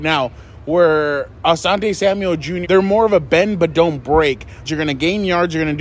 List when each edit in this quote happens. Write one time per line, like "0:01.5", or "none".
0:02.6
0:04.7